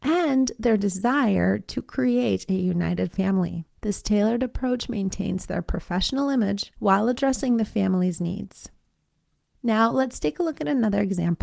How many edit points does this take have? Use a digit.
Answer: 1